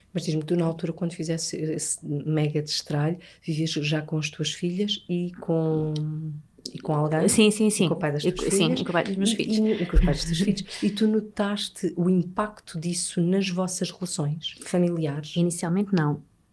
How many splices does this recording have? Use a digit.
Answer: 0